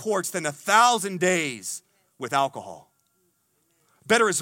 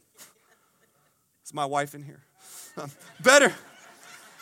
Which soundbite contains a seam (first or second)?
second